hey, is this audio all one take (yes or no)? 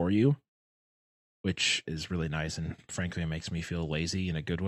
no